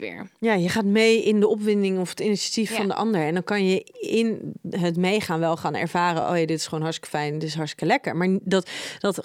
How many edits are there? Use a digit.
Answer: 0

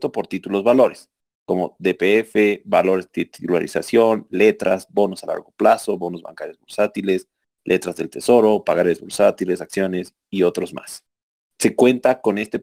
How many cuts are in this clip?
0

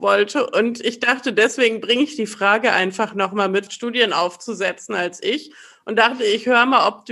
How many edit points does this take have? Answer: 1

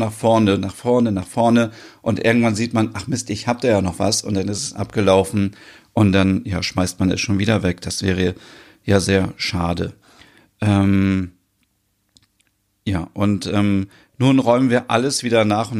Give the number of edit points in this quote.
0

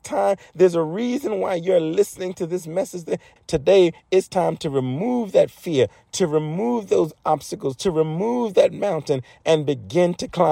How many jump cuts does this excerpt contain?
1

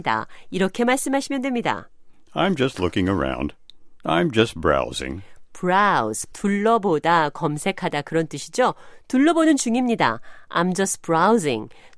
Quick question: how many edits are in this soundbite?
1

